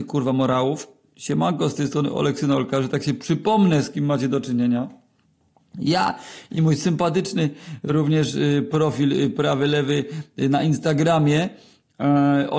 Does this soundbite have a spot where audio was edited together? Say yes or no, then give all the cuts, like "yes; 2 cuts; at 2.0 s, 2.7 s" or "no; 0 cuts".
no; 0 cuts